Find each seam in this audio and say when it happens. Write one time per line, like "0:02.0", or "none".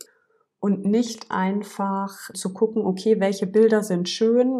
0:02.3